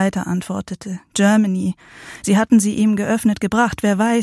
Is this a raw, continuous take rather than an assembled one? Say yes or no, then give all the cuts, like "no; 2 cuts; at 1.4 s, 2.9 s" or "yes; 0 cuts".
no; 2 cuts; at 1.1 s, 2.2 s